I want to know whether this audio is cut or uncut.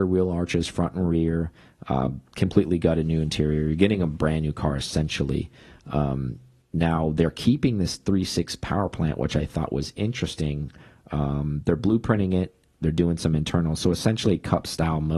uncut